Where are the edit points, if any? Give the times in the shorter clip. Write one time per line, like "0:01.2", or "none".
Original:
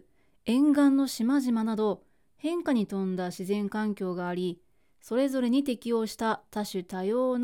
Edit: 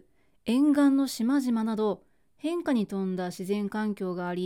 none